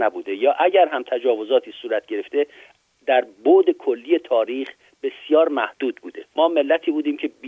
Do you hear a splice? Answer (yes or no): no